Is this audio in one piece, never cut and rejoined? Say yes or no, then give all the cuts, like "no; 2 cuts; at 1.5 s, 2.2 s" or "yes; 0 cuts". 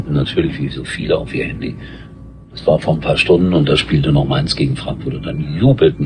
yes; 0 cuts